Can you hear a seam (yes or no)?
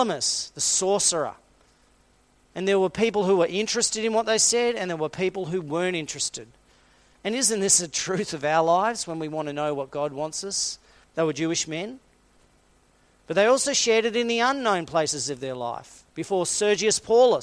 yes